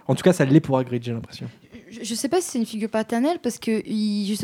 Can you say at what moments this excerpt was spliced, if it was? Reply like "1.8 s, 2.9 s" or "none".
none